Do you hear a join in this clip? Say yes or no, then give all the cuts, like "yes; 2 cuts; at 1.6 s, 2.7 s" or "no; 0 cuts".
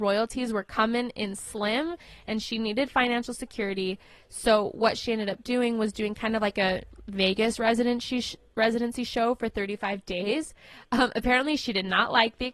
no; 0 cuts